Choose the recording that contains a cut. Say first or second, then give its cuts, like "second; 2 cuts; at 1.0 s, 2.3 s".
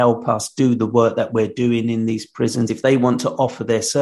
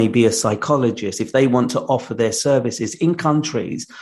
first; 1 cut; at 2.7 s